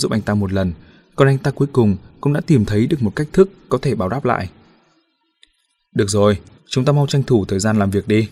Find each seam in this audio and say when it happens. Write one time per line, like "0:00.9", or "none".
0:06.6